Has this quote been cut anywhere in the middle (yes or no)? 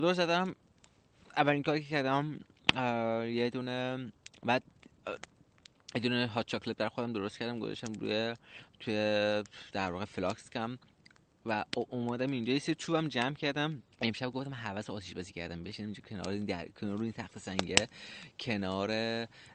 yes